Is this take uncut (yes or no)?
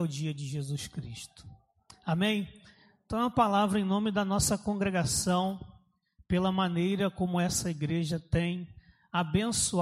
yes